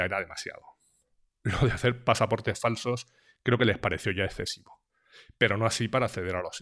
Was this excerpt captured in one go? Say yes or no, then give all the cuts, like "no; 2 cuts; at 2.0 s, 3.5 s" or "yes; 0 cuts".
no; 1 cut; at 1.3 s